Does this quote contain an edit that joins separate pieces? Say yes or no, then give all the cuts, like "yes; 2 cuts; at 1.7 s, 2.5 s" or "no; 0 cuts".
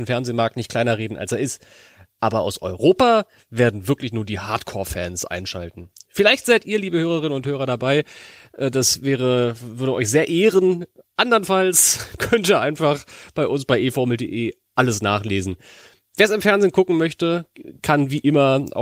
no; 0 cuts